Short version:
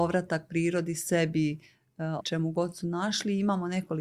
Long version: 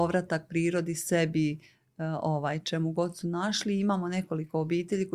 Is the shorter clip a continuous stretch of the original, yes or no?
no